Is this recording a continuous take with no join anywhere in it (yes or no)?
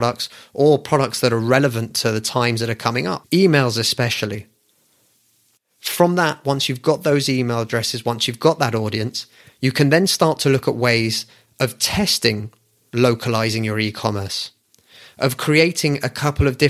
no